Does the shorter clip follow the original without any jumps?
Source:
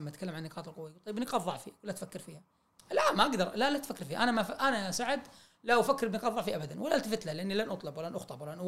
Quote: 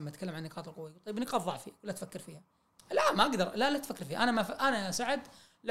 yes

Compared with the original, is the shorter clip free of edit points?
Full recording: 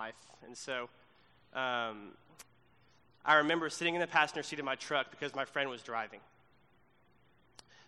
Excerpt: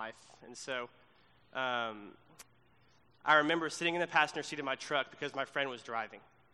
yes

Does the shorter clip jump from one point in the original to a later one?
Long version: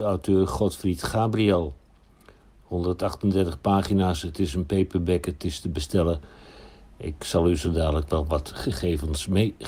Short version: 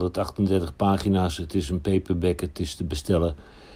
no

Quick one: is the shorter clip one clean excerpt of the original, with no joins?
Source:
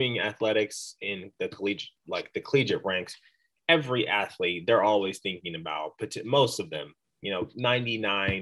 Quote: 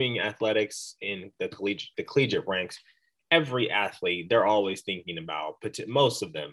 no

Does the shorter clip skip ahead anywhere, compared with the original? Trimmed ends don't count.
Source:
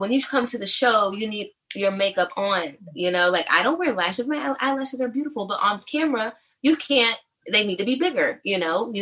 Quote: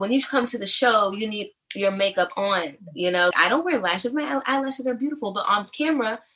yes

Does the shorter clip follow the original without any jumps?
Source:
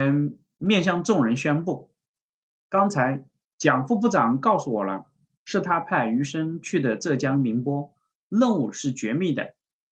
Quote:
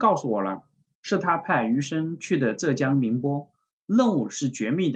yes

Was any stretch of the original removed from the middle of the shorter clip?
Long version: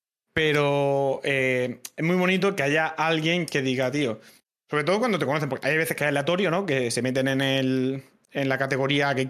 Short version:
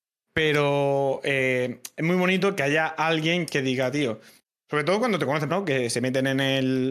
yes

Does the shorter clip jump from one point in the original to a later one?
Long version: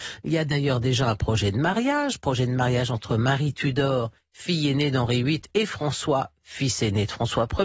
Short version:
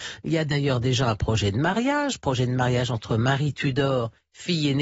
no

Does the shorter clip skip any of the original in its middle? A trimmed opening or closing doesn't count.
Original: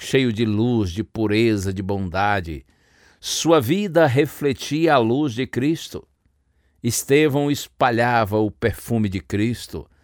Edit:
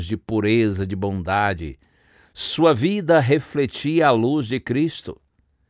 no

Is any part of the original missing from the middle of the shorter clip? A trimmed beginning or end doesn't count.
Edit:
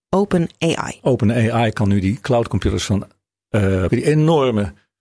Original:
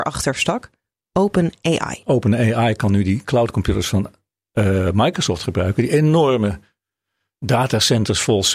yes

